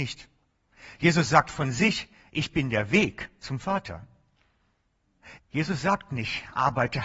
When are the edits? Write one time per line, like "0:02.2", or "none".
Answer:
0:05.4